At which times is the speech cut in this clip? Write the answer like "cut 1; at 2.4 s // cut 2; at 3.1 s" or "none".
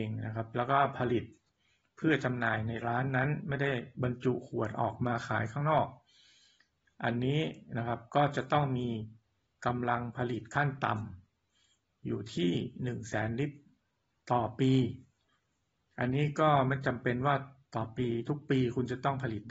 none